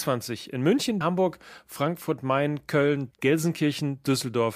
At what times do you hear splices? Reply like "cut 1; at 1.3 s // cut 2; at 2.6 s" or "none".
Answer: cut 1; at 1.0 s // cut 2; at 3.1 s